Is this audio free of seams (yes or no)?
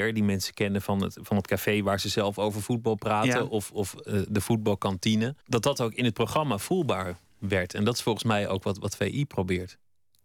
no